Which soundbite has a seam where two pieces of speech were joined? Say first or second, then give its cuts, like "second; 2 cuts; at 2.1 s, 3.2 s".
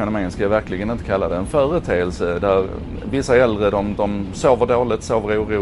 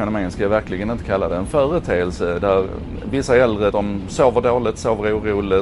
second; 1 cut; at 3.7 s